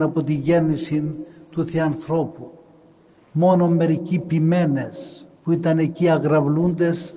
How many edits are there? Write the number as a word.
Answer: two